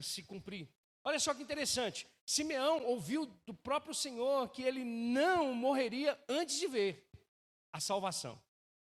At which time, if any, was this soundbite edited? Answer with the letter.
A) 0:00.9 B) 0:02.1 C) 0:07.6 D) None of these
D